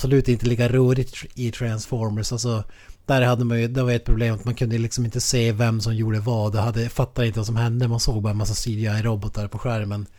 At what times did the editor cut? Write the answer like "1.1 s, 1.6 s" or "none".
none